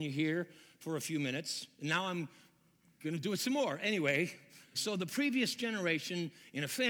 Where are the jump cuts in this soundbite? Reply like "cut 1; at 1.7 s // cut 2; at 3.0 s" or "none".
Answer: cut 1; at 4.7 s